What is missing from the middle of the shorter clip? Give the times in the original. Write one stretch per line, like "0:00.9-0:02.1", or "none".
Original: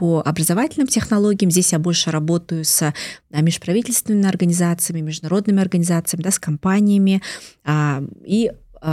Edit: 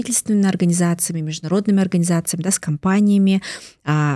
none